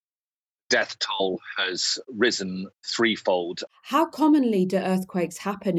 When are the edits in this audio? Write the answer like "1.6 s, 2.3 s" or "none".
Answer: 3.7 s